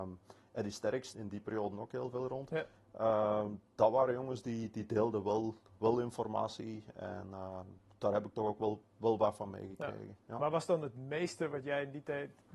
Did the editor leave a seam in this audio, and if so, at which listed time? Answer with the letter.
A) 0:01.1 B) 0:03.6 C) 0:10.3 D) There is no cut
A